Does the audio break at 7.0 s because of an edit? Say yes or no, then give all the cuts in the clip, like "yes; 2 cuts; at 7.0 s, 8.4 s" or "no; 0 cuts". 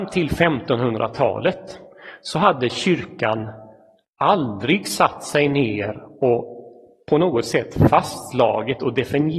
no; 0 cuts